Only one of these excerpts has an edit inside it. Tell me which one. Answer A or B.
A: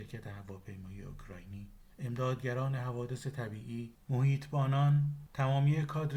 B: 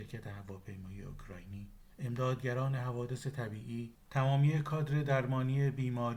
B